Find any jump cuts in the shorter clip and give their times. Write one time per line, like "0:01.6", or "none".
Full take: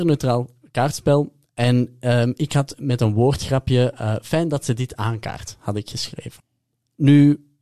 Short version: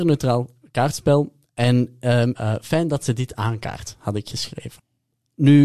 0:02.3